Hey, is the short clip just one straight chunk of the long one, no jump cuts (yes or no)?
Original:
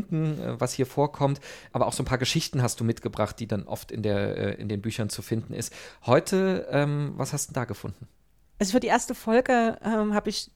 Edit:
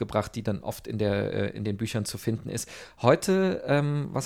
yes